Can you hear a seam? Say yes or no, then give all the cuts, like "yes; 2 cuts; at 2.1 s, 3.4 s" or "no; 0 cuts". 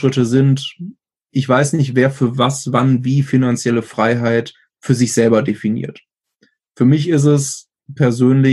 no; 0 cuts